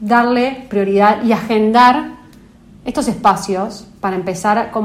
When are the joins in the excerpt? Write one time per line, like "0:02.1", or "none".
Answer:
none